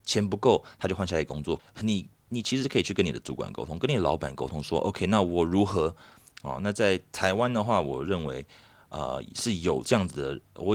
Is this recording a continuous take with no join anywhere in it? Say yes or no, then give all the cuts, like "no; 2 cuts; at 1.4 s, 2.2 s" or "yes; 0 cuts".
no; 2 cuts; at 1.6 s, 6.3 s